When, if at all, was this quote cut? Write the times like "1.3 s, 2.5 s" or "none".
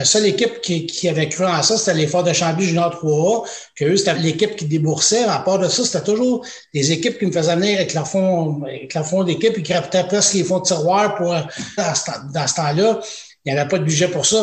4.1 s, 11.8 s